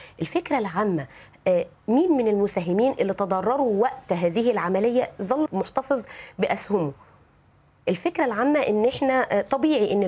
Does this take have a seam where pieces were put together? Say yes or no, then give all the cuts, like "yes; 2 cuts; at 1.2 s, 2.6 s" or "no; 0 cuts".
yes; 1 cut; at 5.5 s